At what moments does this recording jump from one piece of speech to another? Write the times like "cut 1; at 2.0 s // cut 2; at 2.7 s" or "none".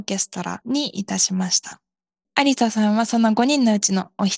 cut 1; at 2.2 s